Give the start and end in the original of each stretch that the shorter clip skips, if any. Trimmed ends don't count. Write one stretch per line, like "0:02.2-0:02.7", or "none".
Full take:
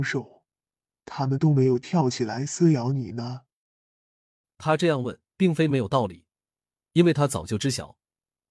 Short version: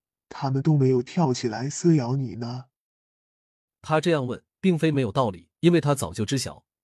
0:06.3-0:06.9

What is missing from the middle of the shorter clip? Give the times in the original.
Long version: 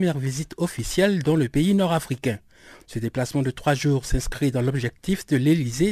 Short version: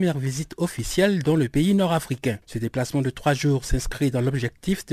0:02.4-0:02.8

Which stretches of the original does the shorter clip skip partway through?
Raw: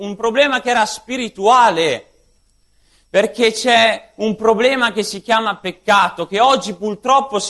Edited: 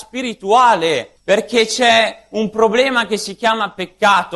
0:02.1-0:03.0

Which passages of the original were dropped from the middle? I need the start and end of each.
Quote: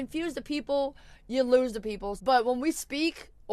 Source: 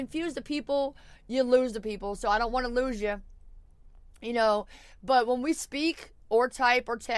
0:02.2-0:05.0

